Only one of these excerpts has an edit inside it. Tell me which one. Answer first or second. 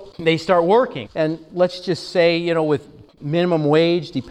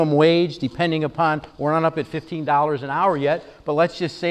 first